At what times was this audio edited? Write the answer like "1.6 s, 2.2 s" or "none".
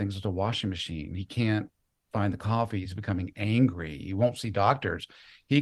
2.8 s